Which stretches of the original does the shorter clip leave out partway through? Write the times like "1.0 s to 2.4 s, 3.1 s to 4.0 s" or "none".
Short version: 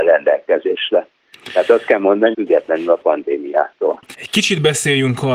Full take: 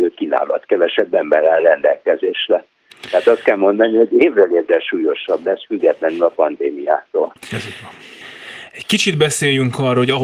3.9 s to 5.7 s, 7.5 s to 8.7 s